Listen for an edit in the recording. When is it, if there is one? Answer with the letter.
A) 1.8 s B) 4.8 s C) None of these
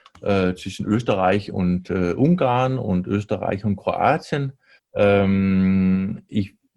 B